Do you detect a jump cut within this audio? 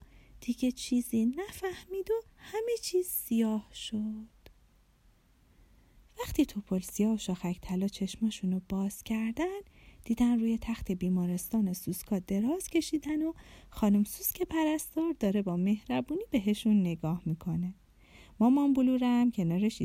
yes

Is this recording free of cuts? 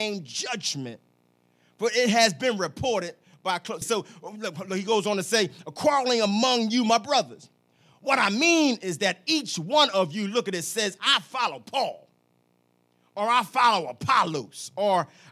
no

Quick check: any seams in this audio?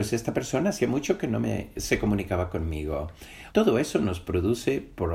yes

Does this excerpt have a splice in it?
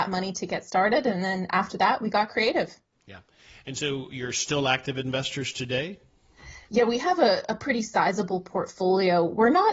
no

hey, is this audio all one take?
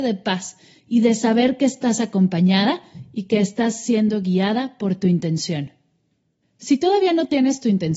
yes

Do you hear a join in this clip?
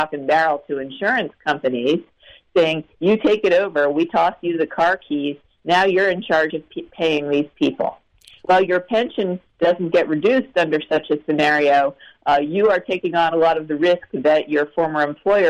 no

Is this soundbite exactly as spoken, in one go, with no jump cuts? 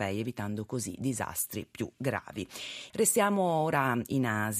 no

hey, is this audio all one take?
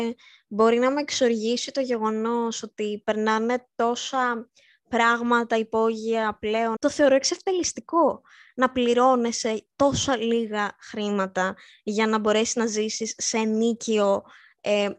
no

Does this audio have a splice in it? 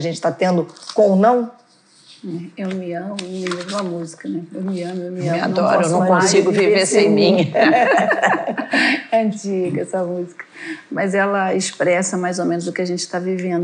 no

